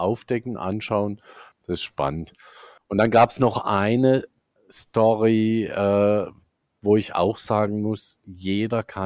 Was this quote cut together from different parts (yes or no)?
yes